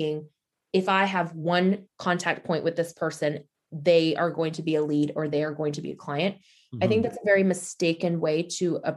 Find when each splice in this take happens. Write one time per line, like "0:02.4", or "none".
none